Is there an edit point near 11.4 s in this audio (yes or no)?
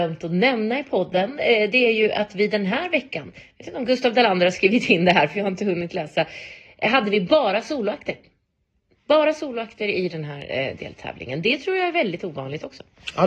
no